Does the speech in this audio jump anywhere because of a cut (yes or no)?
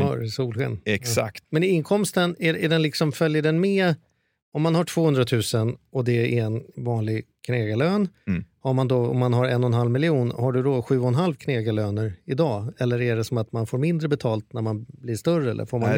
yes